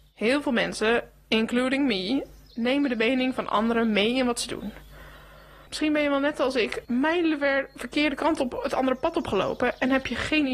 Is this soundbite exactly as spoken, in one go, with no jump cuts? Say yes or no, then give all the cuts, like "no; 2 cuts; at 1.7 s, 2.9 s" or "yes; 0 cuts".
no; 2 cuts; at 5.7 s, 6.8 s